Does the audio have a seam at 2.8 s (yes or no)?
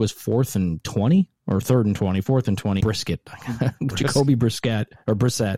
yes